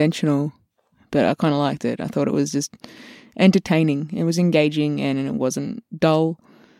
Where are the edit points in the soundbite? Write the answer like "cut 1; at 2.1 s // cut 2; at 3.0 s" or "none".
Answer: none